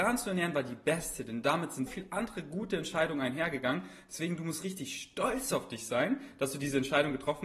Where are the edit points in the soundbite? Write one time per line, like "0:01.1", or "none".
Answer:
0:01.9